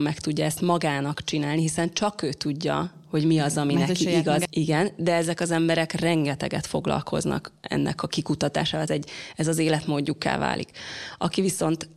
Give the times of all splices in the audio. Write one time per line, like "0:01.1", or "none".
0:04.5
0:08.9